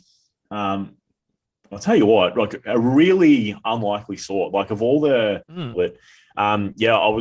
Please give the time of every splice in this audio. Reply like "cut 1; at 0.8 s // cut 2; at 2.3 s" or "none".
cut 1; at 5.7 s